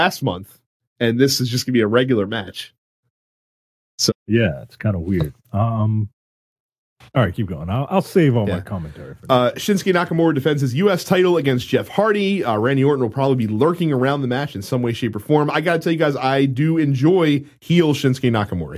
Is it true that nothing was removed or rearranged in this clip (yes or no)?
no